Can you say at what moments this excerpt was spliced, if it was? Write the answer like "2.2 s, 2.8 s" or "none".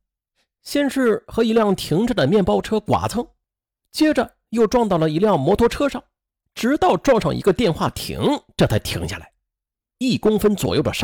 10.0 s